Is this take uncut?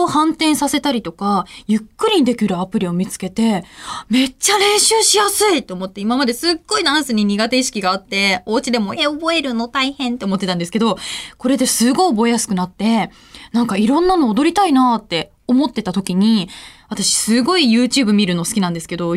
no; 1 cut; at 9.0 s

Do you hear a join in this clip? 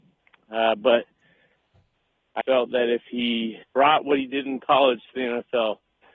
yes; 2 cuts; at 2.4 s, 3.6 s

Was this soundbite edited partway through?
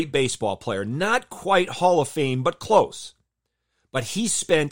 no; 0 cuts

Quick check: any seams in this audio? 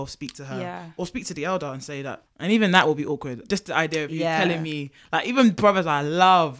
yes; 1 cut; at 2.3 s

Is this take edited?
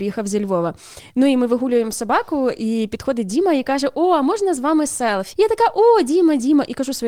yes; 1 cut; at 5.3 s

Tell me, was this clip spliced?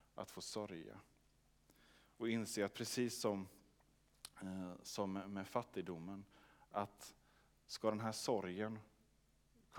no; 0 cuts

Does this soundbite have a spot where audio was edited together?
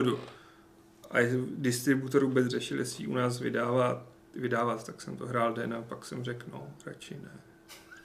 no; 0 cuts

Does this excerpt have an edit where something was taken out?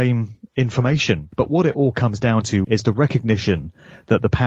yes; 2 cuts; at 1.3 s, 2.6 s

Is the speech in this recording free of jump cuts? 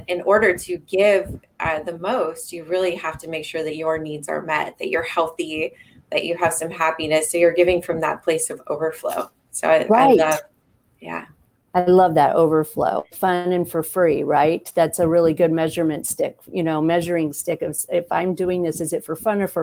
yes; 0 cuts

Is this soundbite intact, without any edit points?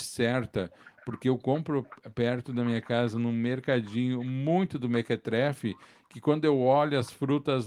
yes; 0 cuts

